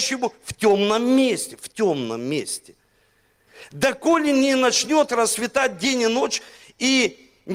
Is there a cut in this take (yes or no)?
no